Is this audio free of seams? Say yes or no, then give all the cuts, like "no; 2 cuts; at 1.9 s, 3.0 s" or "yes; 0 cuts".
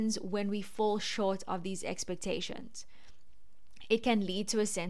yes; 0 cuts